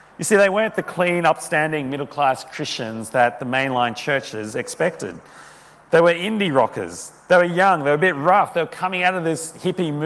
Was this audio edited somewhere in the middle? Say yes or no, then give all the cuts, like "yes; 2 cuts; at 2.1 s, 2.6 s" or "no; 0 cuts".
no; 0 cuts